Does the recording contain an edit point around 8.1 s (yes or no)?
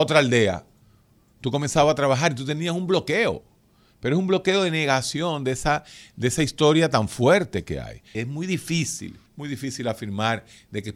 yes